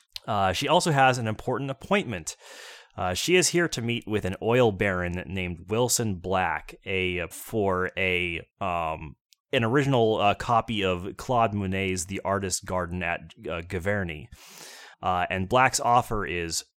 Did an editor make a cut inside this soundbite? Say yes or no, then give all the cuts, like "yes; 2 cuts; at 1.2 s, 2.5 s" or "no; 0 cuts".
yes; 2 cuts; at 7.3 s, 14.9 s